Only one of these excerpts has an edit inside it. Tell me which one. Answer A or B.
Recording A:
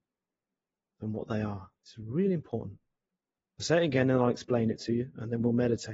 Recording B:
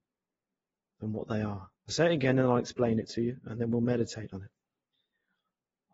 B